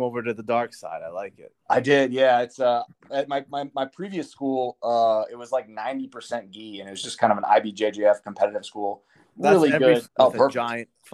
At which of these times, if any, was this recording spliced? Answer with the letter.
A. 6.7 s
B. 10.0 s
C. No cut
B